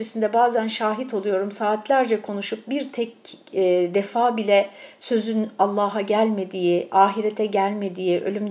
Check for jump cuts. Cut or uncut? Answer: uncut